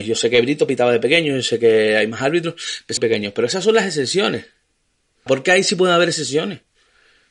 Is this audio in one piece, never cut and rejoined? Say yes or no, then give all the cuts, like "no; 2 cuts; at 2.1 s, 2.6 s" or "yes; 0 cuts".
no; 2 cuts; at 3.0 s, 5.3 s